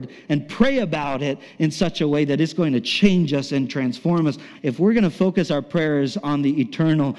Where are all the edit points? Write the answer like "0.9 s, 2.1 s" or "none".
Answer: 4.5 s